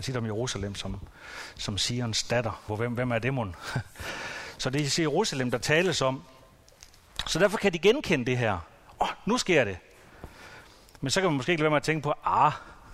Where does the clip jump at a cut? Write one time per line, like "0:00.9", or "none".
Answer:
0:02.7